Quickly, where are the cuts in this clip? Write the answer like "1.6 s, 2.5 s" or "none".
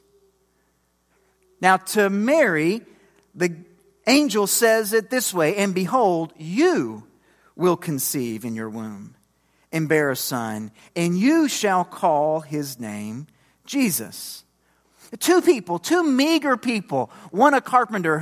none